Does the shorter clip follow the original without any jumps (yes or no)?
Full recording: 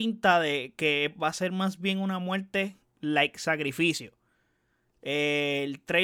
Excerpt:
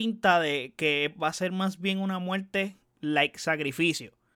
yes